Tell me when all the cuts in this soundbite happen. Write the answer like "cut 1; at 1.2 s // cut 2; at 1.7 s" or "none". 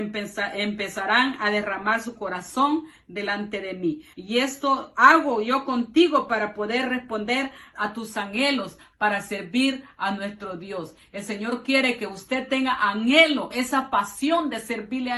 cut 1; at 4.1 s // cut 2; at 7.7 s // cut 3; at 13.5 s